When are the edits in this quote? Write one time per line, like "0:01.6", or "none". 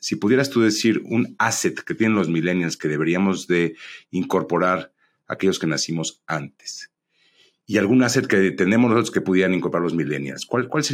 none